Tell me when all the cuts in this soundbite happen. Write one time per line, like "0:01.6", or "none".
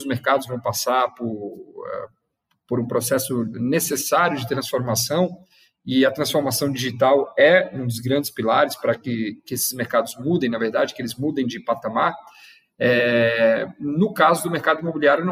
none